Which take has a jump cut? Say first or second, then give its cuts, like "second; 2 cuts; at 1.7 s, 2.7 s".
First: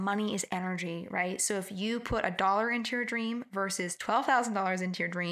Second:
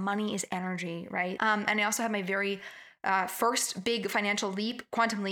second; 1 cut; at 1.4 s